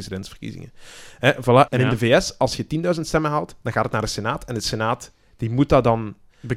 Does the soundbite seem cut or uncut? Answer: cut